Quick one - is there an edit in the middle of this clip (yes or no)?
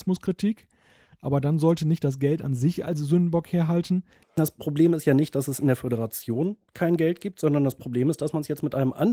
yes